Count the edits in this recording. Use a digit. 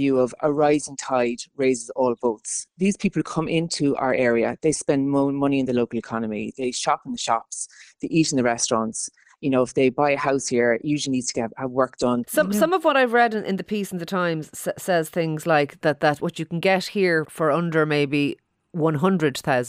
3